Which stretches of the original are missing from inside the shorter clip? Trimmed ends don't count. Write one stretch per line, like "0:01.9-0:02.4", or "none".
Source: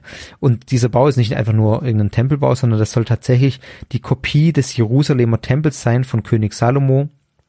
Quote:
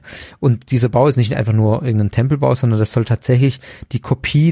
none